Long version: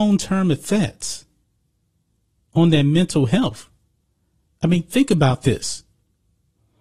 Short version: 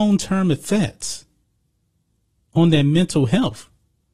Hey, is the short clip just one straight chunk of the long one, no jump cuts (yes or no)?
yes